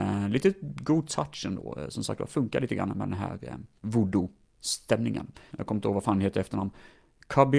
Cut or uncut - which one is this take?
cut